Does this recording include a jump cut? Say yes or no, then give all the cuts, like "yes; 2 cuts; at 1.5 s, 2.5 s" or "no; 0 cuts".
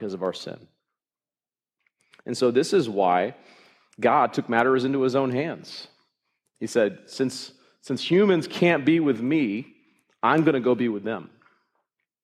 no; 0 cuts